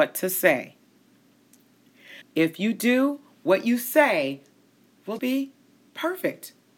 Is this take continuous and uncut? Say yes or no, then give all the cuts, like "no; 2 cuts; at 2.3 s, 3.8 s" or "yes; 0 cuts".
no; 2 cuts; at 2.2 s, 5.2 s